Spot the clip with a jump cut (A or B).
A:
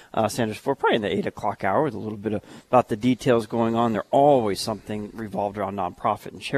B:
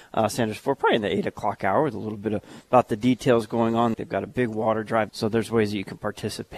B